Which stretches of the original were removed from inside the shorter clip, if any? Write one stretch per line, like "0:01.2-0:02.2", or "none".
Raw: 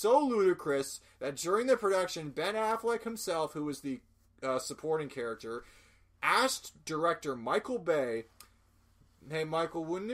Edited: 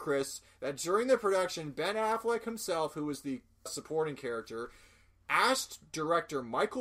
0:04.2-0:04.6

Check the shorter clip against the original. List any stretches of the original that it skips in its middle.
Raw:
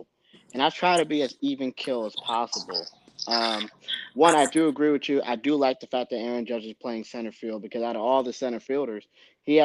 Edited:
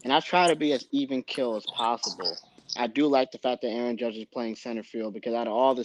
0:03.3-0:05.2

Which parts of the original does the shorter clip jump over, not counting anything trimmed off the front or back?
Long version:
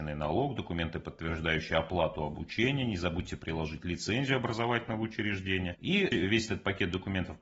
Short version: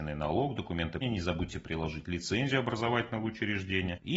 0:01.0-0:02.8

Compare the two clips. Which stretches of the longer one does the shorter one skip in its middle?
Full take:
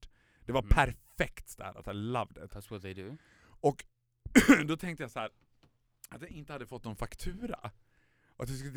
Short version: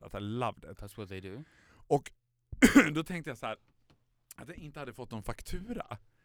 none

